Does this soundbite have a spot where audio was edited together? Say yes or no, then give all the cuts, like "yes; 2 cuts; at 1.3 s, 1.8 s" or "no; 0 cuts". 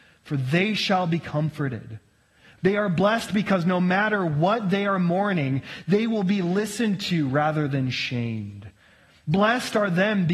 yes; 1 cut; at 2.6 s